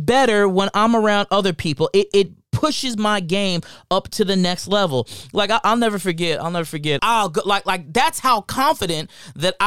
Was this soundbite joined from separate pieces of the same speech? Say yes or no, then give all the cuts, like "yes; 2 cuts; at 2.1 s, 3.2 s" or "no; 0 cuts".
yes; 1 cut; at 7.0 s